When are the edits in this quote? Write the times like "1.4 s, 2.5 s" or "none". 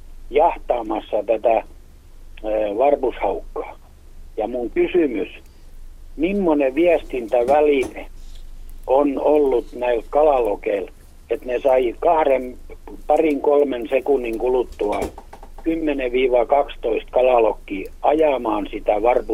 none